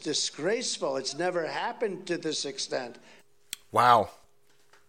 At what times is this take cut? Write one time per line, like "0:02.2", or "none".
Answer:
none